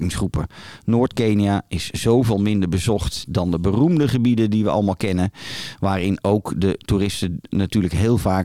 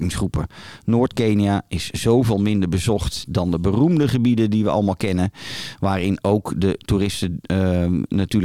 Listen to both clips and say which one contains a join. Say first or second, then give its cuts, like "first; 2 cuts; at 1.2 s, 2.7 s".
first; 1 cut; at 7.5 s